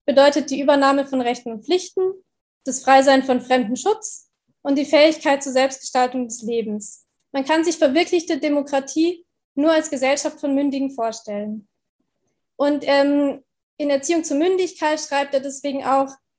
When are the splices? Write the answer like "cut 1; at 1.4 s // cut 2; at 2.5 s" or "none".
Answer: cut 1; at 7.2 s // cut 2; at 12.5 s